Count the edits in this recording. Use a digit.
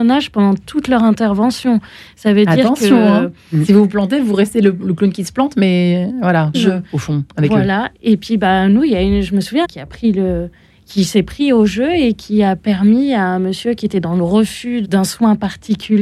3